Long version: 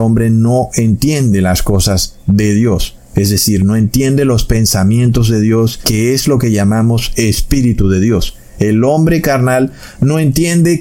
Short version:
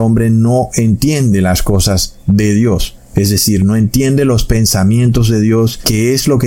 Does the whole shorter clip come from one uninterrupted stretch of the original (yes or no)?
yes